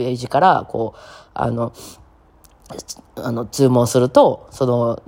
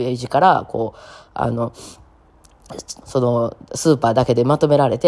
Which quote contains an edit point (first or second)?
second